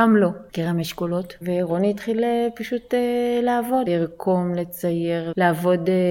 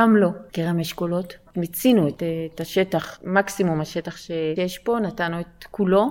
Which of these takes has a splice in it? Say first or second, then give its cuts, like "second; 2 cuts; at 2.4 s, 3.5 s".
first; 2 cuts; at 1.4 s, 3.9 s